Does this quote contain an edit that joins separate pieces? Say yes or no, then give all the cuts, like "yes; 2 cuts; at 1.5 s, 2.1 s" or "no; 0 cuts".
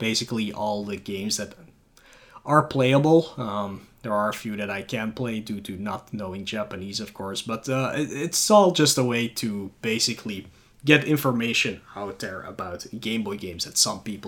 no; 0 cuts